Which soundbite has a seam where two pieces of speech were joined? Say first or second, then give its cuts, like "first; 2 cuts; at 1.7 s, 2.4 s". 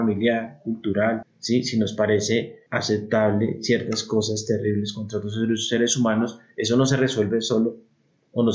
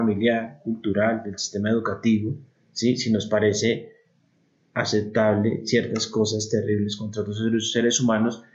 first; 2 cuts; at 1.2 s, 2.7 s